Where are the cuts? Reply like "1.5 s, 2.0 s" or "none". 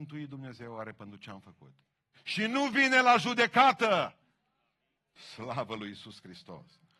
2.1 s, 4.9 s